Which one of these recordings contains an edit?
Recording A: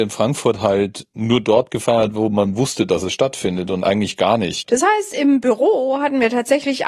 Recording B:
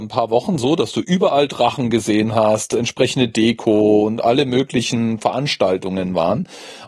A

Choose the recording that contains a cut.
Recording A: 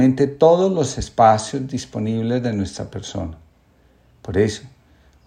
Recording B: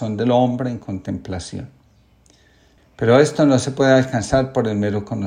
B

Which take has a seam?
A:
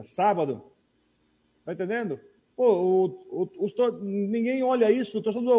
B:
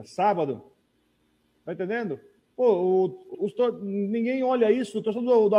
B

